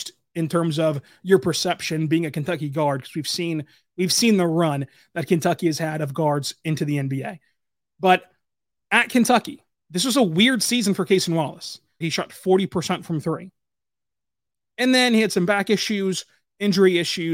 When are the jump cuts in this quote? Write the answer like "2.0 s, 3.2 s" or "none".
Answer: 12.0 s